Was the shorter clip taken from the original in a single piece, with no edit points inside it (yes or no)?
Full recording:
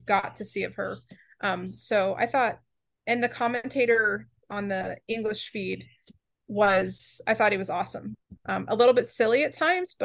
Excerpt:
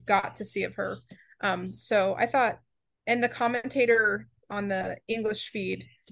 yes